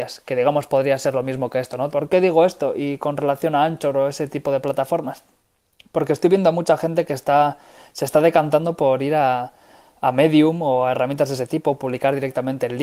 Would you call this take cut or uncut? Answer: cut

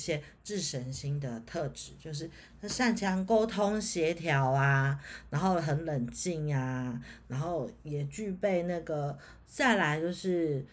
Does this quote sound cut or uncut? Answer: cut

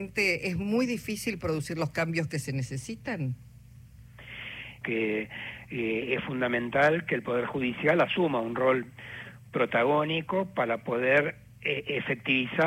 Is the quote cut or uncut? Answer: cut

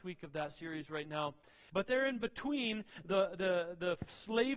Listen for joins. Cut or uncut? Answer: cut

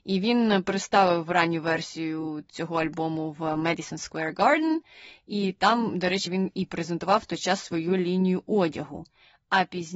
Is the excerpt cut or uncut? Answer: uncut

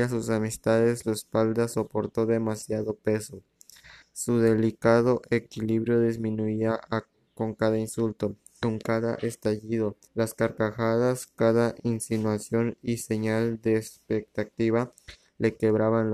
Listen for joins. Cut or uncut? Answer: cut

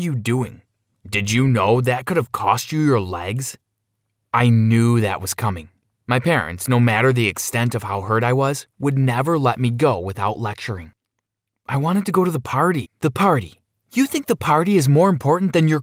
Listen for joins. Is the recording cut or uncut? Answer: cut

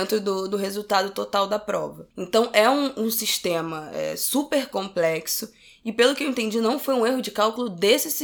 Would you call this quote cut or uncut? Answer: uncut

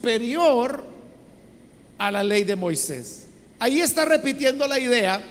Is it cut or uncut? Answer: cut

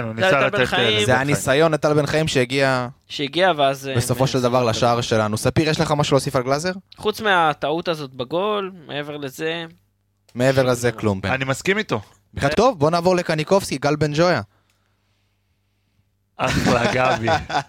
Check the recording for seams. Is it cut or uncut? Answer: cut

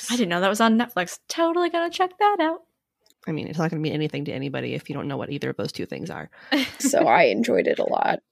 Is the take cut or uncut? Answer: cut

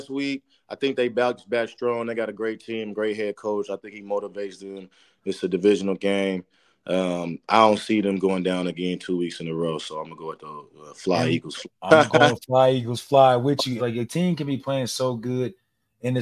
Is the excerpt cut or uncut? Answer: cut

